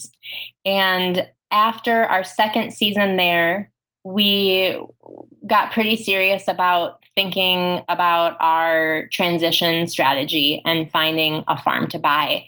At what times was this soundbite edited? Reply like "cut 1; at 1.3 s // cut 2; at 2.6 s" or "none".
none